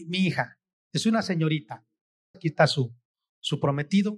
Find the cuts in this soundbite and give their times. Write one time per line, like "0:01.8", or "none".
0:02.3